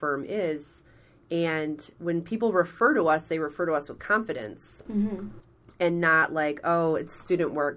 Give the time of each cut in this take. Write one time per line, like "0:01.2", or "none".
none